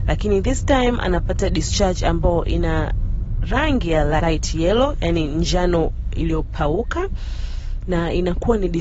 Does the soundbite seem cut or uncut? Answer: cut